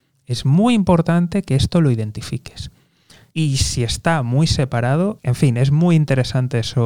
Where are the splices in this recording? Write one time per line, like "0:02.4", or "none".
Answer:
0:03.3
0:05.2

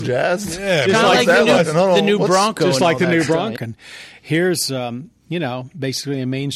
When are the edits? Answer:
0:03.6

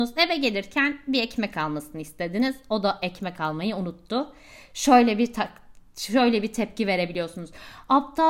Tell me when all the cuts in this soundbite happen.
none

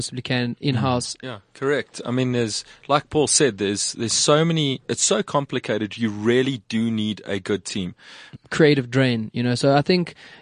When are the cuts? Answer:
0:01.2
0:08.3

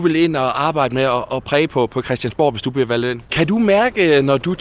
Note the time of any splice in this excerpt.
0:03.3

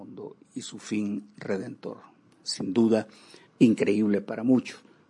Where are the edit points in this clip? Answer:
0:03.4

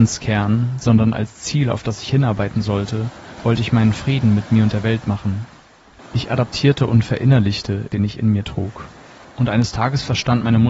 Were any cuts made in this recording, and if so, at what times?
0:06.0
0:07.9
0:09.2

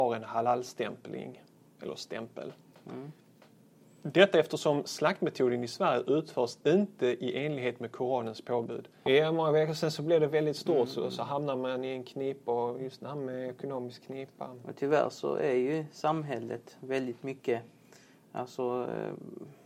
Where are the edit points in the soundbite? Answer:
0:09.1

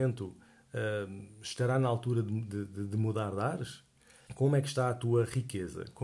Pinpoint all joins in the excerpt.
0:04.3

